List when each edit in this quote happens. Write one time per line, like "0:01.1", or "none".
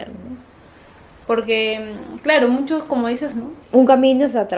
0:01.2
0:03.3